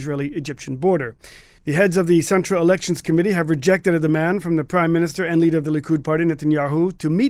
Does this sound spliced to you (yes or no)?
yes